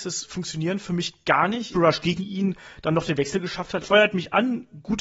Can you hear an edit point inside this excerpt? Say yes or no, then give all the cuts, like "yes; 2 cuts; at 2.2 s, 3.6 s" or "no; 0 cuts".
yes; 2 cuts; at 1.7 s, 3.8 s